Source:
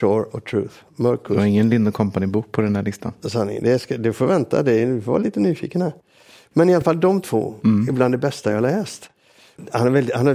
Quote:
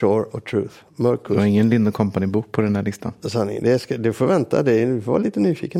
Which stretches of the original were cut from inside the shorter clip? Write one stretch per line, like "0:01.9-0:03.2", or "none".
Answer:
none